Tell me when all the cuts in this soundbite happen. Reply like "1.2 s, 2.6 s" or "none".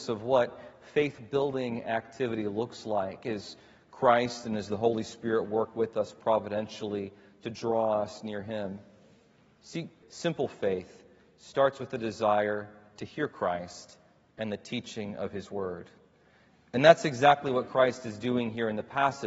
10.0 s